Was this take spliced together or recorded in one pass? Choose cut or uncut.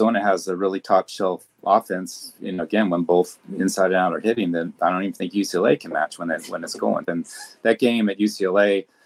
cut